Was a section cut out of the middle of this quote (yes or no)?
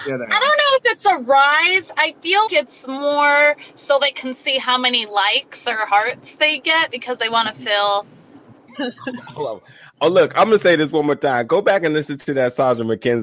yes